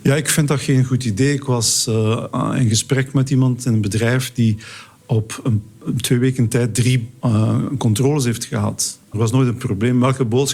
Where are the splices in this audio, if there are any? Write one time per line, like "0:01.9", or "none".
0:07.2
0:09.1